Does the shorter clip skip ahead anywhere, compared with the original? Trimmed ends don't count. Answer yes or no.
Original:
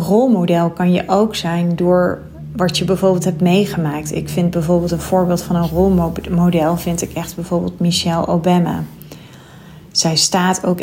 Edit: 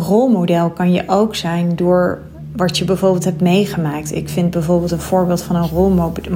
no